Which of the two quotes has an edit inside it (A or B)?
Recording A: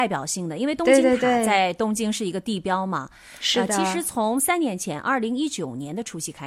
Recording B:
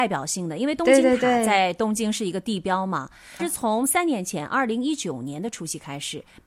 B